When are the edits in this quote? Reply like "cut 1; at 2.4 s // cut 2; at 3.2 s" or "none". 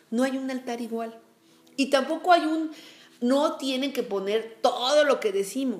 none